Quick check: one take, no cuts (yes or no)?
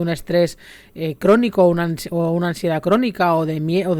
yes